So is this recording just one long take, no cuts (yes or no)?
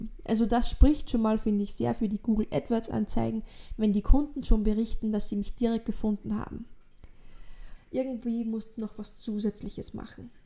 no